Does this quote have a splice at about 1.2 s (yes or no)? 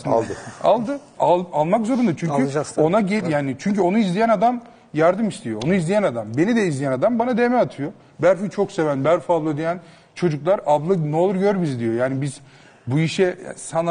yes